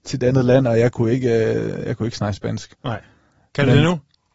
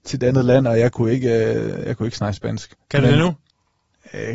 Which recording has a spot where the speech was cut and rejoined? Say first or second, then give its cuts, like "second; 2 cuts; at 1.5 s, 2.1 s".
second; 1 cut; at 2.8 s